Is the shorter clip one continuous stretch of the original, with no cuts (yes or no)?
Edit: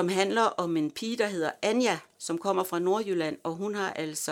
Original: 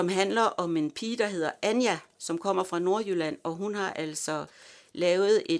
yes